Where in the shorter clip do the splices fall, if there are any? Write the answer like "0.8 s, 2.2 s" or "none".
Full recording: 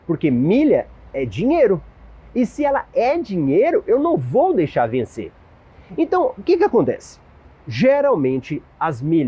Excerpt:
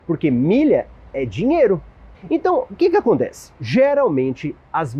2.1 s, 3.6 s